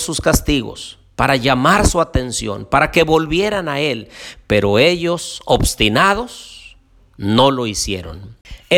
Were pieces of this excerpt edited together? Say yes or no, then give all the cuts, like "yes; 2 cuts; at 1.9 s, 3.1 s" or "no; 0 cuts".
no; 0 cuts